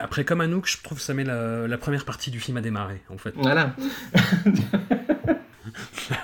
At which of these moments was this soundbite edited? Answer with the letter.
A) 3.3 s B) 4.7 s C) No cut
A